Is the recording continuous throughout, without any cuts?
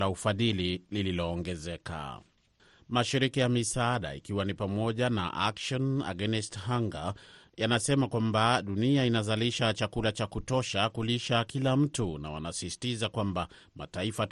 yes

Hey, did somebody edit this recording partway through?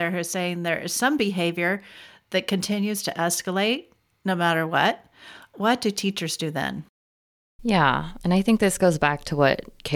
no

